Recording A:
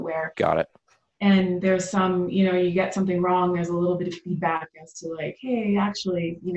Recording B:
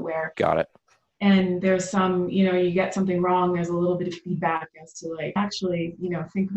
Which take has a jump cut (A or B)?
B